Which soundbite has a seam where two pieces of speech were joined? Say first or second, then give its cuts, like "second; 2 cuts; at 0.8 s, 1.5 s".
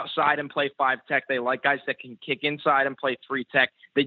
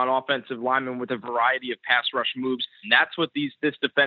second; 1 cut; at 2.8 s